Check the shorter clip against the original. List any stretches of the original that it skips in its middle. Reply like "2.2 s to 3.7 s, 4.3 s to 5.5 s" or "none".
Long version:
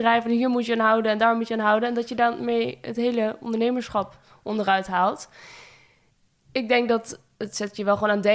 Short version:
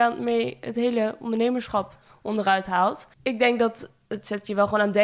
5.3 s to 6.4 s